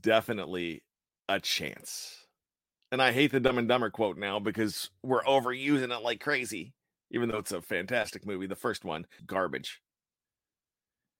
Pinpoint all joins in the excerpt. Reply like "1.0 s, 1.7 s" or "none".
9.2 s